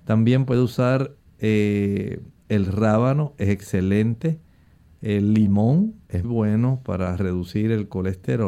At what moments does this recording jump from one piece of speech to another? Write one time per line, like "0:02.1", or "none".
0:06.2